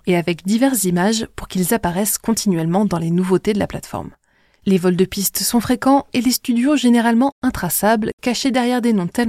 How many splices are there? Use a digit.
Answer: 0